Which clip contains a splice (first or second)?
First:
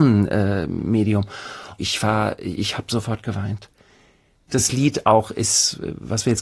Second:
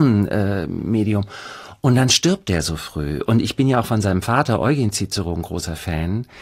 first